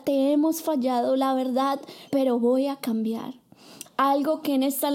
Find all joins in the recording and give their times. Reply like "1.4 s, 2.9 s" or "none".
2.1 s, 3.8 s